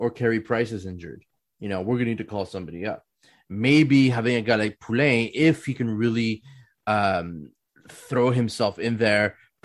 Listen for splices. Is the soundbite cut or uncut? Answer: uncut